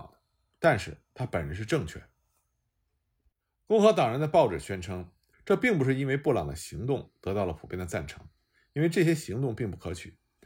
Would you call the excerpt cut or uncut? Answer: cut